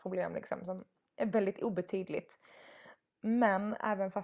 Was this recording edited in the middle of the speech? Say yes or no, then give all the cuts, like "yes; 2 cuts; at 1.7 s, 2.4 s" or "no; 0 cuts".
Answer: no; 0 cuts